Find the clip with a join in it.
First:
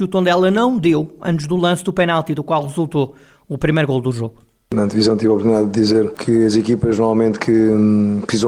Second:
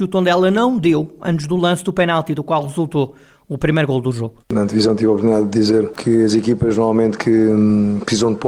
second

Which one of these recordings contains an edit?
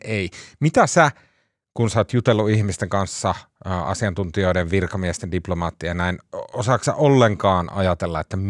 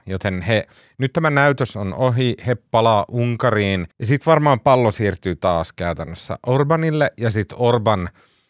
second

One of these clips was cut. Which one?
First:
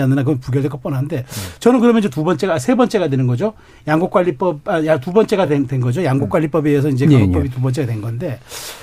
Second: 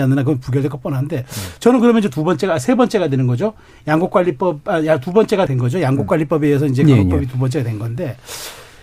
second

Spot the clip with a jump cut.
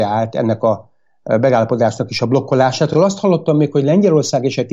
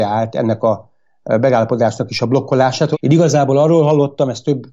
second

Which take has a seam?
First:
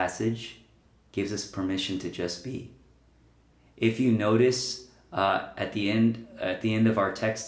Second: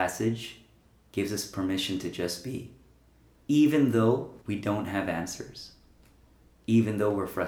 second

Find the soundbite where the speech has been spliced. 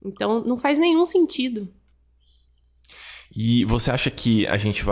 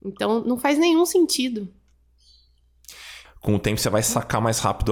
second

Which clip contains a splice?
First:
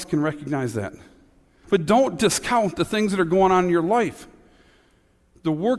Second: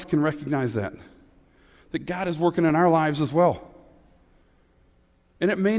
first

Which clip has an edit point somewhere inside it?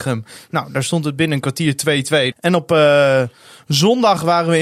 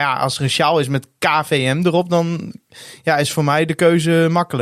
first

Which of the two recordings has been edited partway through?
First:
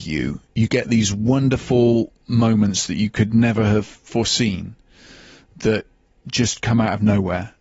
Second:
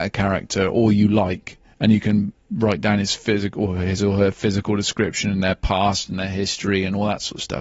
second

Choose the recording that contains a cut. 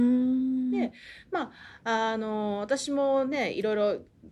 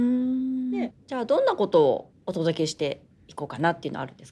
second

